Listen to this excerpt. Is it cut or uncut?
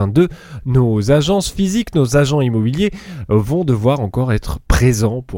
uncut